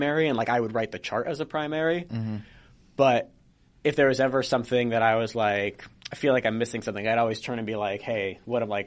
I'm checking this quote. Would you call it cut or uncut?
uncut